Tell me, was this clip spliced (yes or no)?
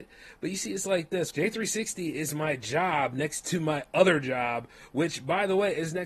yes